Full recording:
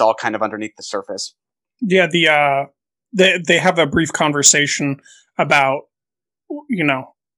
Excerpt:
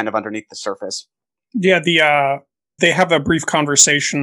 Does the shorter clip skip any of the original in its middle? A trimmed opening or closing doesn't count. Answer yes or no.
yes